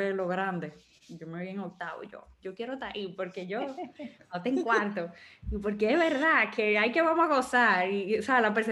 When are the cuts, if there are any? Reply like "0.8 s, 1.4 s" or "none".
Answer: none